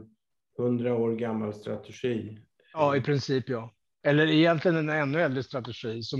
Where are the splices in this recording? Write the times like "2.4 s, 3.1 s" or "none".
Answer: 4.0 s